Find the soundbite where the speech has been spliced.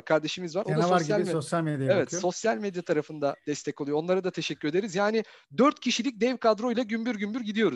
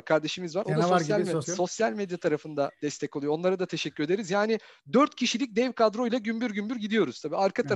second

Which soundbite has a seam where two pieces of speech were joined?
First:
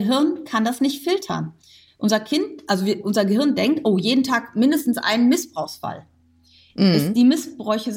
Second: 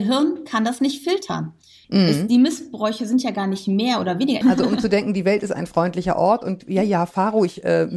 second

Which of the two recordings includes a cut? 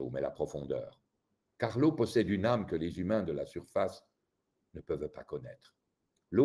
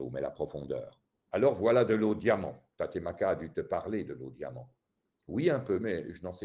second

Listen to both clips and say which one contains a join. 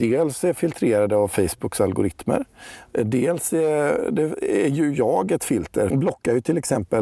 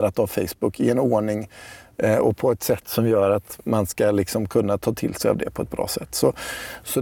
first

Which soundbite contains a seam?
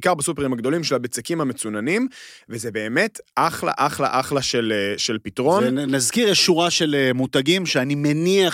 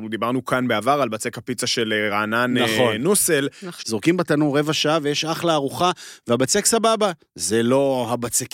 second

